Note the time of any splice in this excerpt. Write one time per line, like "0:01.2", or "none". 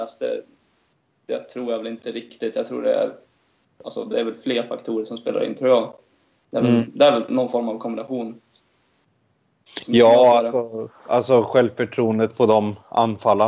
none

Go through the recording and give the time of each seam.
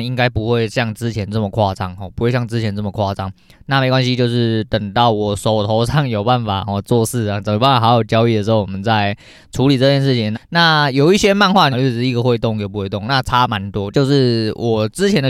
0:10.3
0:11.7
0:13.9

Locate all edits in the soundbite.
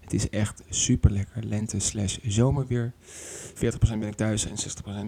0:03.6

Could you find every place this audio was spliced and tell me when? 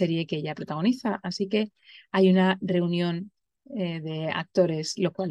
none

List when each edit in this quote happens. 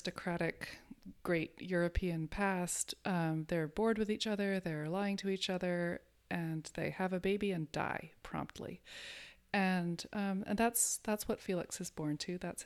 none

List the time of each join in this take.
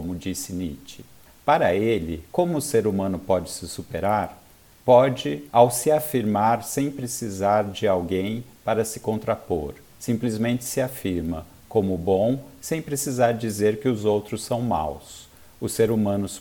0:09.9

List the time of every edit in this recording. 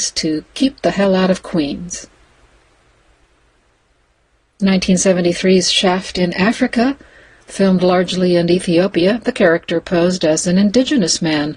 none

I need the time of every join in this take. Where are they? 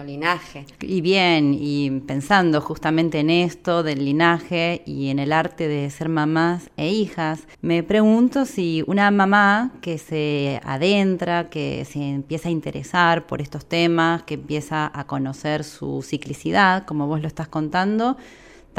0:07.5

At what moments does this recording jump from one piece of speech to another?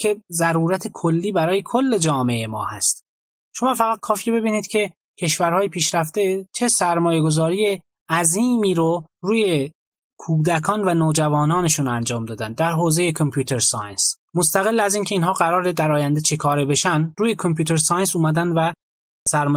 0:09.1
0:14.2

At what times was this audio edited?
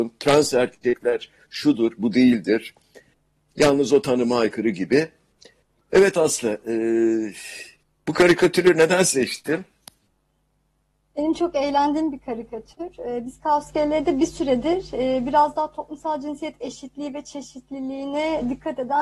none

